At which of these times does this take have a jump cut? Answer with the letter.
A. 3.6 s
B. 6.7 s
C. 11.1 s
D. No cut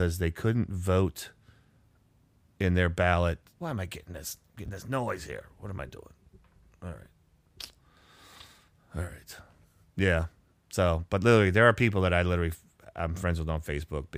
A